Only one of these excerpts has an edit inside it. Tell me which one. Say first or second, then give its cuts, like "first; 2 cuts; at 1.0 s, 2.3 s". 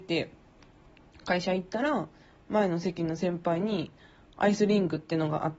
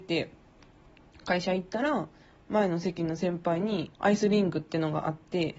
second; 1 cut; at 3.9 s